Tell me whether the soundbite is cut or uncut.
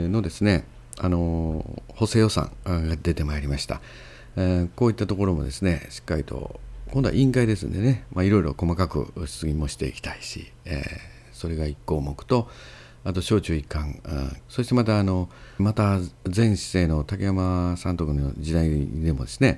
cut